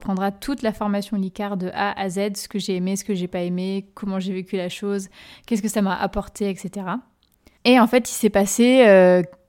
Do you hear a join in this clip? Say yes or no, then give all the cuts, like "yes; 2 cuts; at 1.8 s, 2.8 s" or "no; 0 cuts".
no; 0 cuts